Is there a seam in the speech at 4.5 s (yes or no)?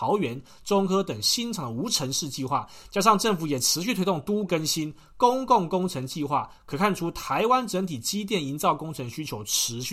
yes